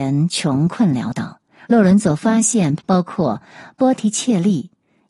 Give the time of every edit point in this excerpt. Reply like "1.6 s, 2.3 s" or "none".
1.6 s, 2.8 s

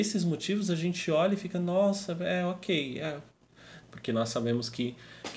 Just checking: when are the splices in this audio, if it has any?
3.8 s

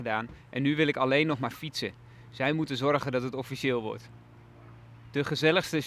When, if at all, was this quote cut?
none

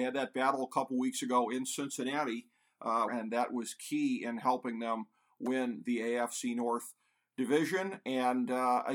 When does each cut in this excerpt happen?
3.1 s

